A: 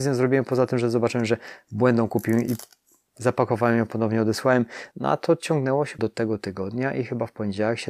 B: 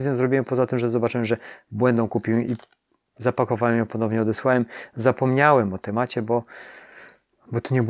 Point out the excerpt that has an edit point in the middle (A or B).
A